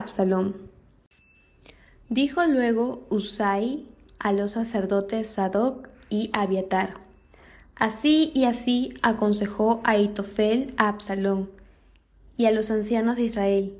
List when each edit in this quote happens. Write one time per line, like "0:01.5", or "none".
none